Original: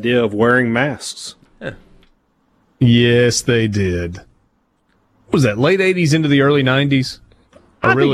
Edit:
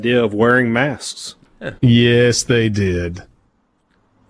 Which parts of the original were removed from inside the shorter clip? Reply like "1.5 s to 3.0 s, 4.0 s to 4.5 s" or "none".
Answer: 1.8 s to 2.8 s